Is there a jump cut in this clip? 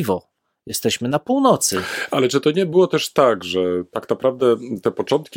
no; 0 cuts

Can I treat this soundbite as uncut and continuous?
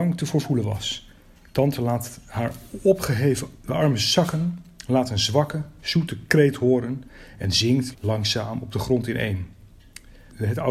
no; 1 cut; at 7.9 s

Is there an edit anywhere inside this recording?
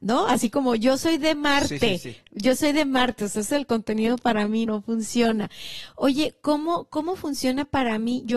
yes; 1 cut; at 4.7 s

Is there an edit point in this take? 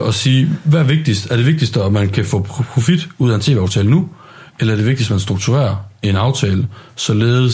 no; 0 cuts

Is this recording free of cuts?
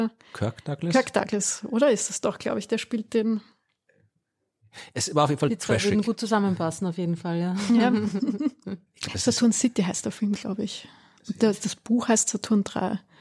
yes; 0 cuts

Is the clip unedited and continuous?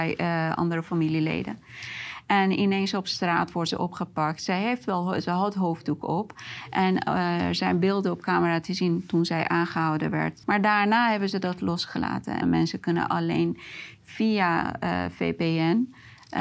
no; 2 cuts; at 10.4 s, 12.4 s

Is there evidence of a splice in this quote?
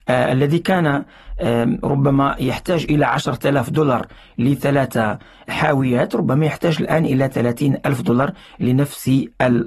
no; 0 cuts

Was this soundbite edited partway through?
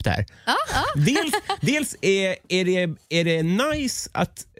no; 0 cuts

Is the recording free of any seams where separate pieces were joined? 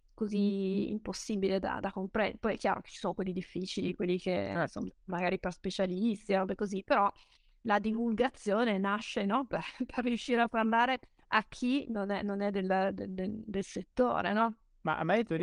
yes; 0 cuts

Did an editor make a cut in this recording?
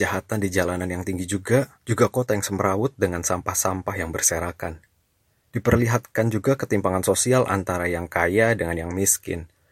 yes; 1 cut; at 1.7 s

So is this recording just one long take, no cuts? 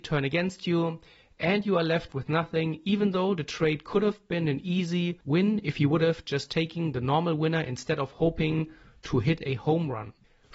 yes; 0 cuts

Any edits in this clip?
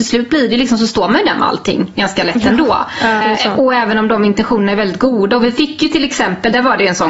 yes; 1 cut; at 3.2 s

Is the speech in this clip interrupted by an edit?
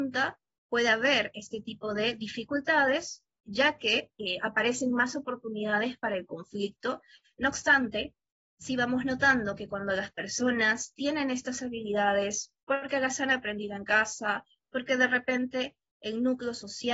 yes; 1 cut; at 7.3 s

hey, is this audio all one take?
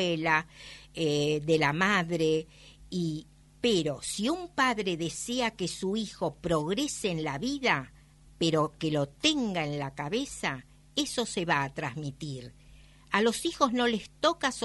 no; 1 cut; at 8.2 s

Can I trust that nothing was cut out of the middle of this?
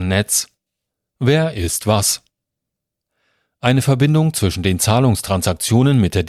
yes; 0 cuts

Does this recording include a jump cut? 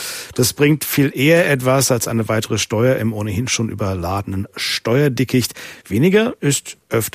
no; 0 cuts

